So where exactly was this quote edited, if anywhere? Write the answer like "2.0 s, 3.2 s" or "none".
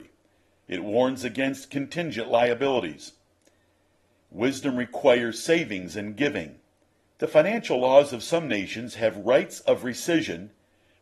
7.0 s